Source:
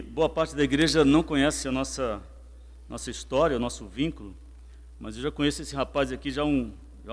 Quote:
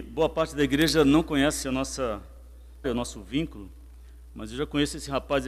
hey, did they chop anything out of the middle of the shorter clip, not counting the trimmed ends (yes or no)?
yes